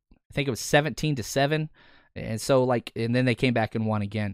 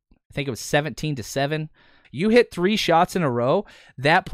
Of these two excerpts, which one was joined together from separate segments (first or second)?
second